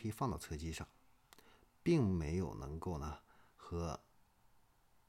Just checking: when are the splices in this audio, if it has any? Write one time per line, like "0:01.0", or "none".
none